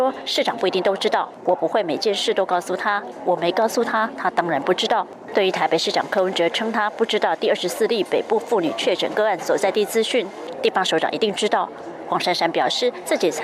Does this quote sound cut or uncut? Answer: cut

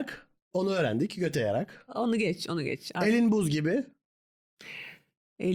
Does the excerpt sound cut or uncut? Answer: uncut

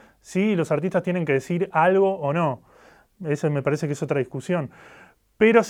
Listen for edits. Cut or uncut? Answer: uncut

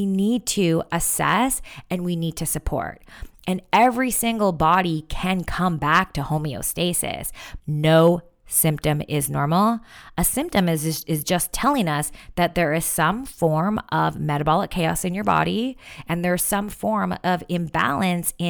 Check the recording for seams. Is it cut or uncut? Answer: cut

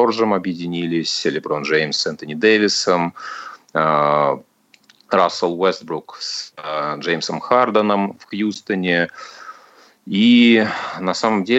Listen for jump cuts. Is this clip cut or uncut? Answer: uncut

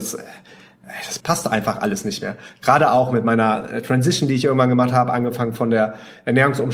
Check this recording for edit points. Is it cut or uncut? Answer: cut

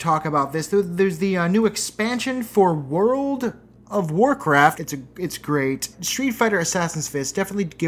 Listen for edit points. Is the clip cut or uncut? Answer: cut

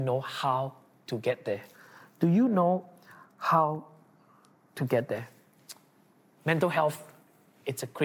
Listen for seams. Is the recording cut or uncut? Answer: uncut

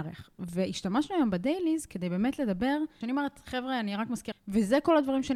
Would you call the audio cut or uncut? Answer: cut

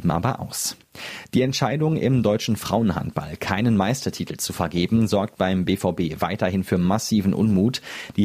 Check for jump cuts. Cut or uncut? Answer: uncut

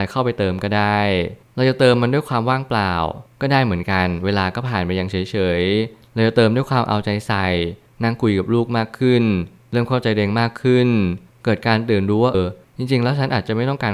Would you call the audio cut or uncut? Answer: cut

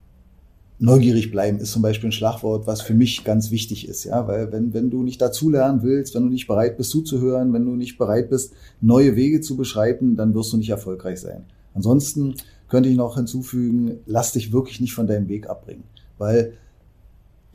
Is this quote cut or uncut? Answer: uncut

